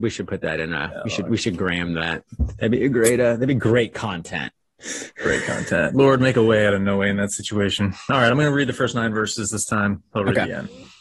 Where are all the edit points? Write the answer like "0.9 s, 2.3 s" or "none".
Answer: none